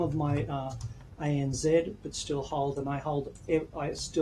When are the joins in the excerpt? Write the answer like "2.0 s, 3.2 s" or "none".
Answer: none